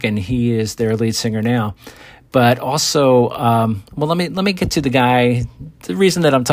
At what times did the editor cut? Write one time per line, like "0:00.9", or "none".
none